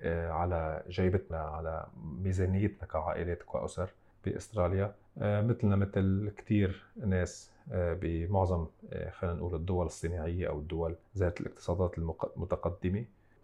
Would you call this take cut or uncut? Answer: cut